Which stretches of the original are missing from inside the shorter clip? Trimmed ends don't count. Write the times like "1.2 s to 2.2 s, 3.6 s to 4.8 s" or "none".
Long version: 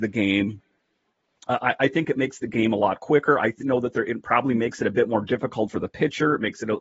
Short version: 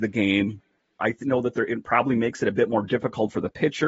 1.0 s to 3.4 s

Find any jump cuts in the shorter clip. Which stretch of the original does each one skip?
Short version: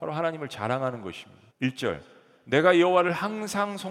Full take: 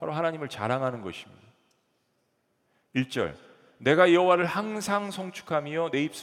1.5 s to 2.8 s

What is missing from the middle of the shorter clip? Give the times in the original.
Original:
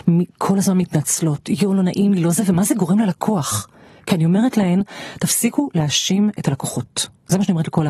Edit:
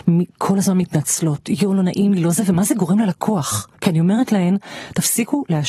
3.8 s to 4.0 s

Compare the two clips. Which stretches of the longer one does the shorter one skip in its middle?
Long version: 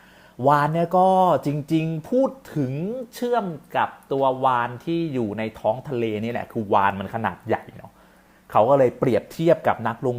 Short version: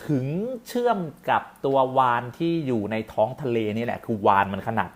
none

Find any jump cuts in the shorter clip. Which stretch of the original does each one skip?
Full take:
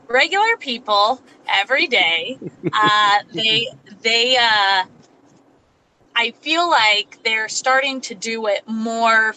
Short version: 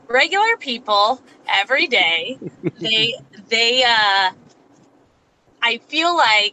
2.7 s to 3.2 s

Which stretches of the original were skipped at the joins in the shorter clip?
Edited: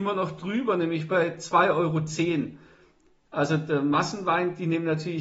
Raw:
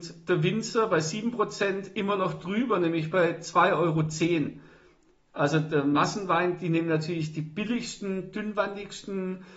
none

